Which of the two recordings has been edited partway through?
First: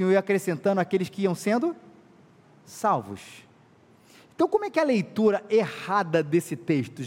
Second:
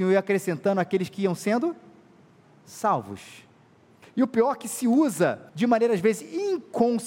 second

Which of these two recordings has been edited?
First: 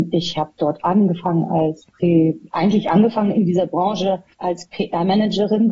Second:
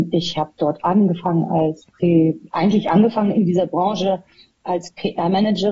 first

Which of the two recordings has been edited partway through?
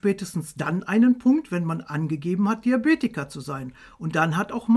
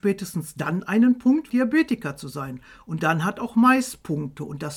second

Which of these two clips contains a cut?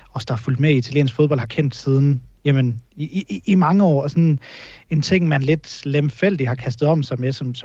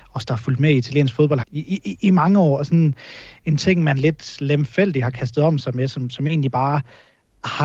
second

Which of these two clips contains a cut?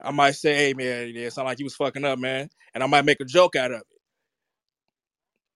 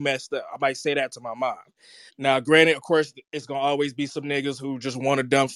second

